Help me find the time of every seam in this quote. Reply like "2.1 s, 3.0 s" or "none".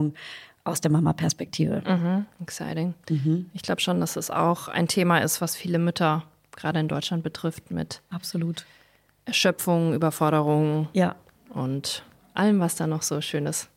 2.3 s